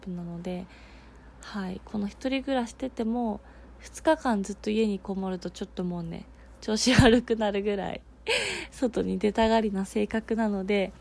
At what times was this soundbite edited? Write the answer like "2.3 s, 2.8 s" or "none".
2.7 s